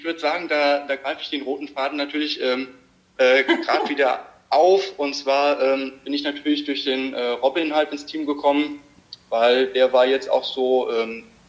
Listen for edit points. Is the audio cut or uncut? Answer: uncut